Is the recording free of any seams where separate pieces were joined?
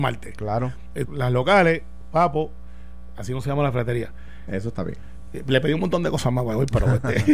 no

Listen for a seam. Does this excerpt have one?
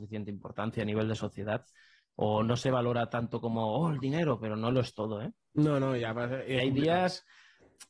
no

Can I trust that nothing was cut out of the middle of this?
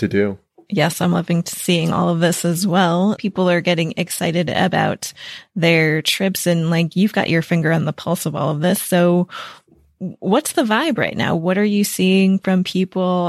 no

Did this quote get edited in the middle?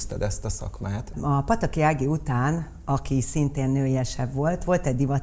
yes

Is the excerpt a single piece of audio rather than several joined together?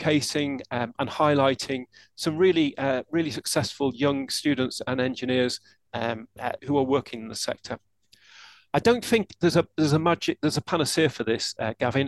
no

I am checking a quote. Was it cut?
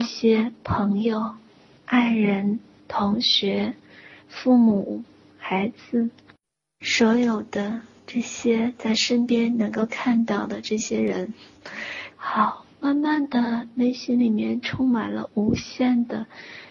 yes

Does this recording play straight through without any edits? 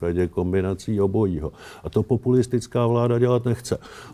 yes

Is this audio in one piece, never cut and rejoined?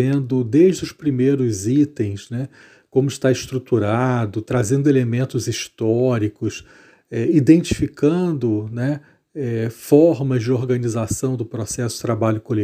yes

